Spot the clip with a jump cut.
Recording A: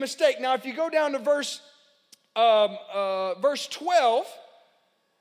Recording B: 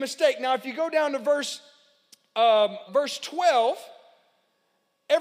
B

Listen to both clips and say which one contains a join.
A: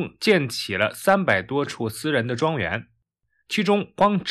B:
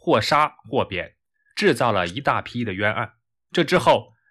B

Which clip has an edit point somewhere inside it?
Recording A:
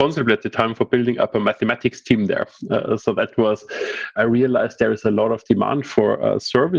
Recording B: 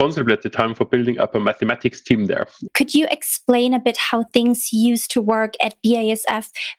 B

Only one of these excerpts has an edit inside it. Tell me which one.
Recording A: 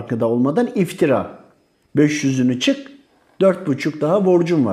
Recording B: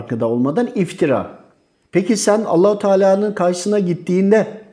A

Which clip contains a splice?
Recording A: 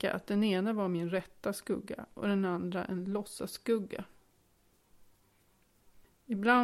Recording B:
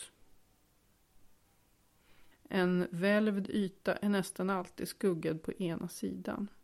B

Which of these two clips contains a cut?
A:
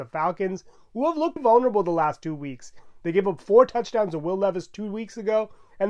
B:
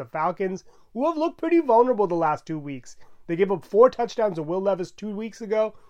A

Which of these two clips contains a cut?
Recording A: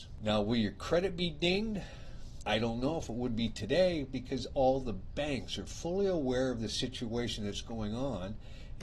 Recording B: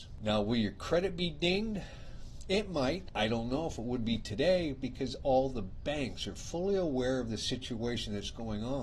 A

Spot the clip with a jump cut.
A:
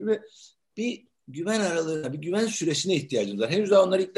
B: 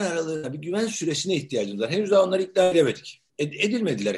B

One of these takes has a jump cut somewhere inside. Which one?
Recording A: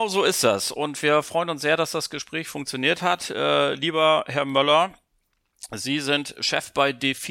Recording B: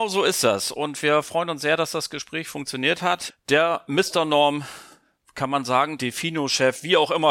B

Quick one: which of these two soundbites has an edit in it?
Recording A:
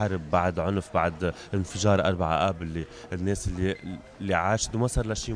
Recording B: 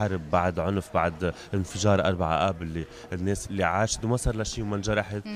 B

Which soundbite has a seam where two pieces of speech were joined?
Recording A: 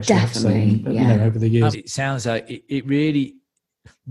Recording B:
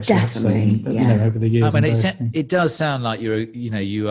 A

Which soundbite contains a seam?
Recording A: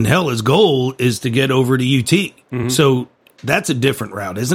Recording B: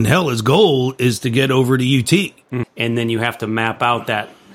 B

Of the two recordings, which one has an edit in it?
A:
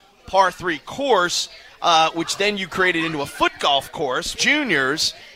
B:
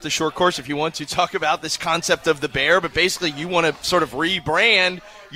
A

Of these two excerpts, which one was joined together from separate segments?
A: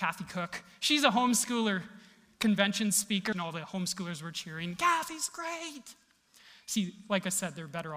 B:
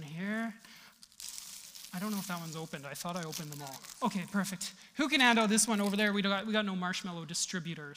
A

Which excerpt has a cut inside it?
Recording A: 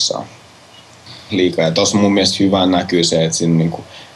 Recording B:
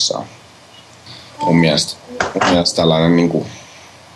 A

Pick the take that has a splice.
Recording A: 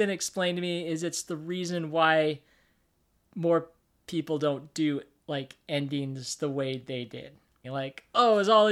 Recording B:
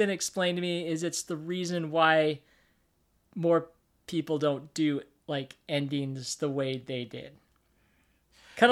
A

